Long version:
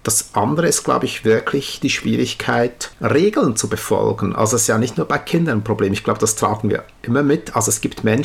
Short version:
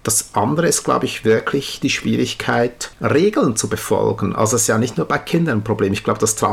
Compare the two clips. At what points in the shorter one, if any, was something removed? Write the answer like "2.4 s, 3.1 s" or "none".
none